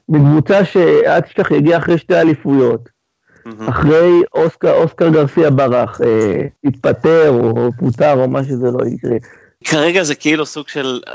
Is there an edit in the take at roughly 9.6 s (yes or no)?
yes